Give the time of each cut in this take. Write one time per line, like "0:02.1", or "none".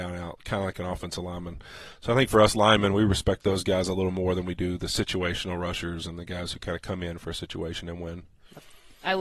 none